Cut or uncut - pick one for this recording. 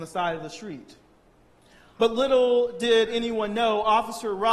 cut